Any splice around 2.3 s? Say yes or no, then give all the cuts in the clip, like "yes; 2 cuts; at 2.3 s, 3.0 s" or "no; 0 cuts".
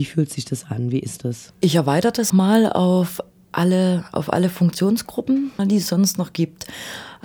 yes; 2 cuts; at 2.3 s, 5.6 s